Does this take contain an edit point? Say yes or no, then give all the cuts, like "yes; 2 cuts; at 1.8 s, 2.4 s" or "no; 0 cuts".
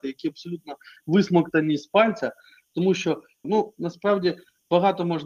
yes; 1 cut; at 3.4 s